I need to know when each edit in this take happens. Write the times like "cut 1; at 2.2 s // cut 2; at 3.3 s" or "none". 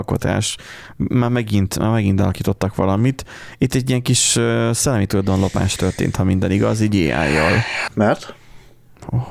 cut 1; at 7.9 s